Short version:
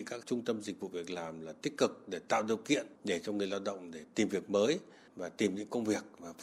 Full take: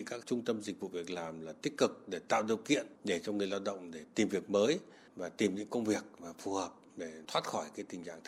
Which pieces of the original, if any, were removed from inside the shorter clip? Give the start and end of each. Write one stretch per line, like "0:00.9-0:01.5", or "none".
none